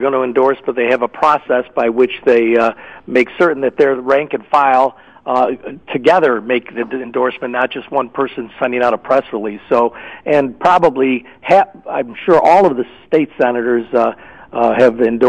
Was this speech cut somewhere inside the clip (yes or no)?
no